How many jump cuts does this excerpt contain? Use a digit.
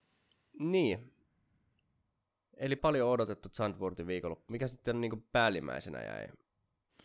1